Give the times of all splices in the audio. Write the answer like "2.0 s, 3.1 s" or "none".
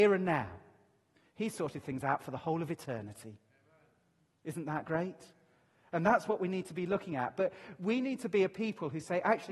none